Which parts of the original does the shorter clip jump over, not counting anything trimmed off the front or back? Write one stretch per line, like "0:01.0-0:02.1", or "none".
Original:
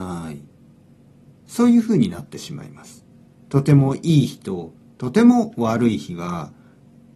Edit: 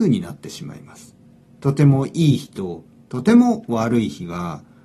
none